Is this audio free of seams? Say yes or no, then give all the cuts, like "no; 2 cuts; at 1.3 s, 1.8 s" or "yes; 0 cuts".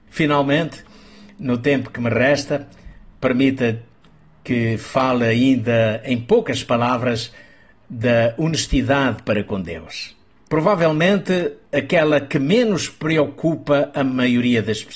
yes; 0 cuts